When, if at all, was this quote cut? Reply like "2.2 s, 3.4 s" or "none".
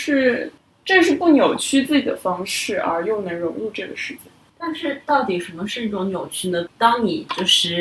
6.7 s